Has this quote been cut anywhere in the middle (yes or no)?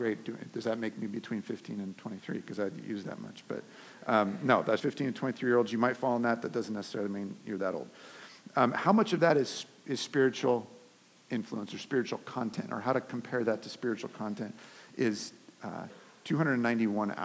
yes